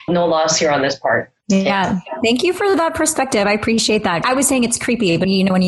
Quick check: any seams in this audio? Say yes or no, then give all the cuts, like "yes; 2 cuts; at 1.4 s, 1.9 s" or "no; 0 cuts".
no; 0 cuts